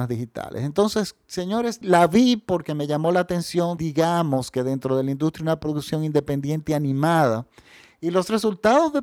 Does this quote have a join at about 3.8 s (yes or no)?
yes